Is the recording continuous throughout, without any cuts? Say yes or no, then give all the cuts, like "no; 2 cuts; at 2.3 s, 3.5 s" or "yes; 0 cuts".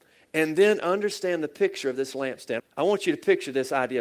no; 1 cut; at 2.6 s